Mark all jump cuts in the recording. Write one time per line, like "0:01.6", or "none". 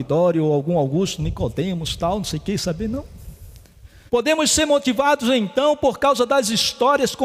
0:04.1